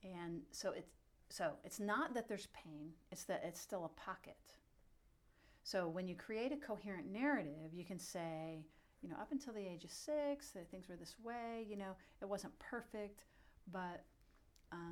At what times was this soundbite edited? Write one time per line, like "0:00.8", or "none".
none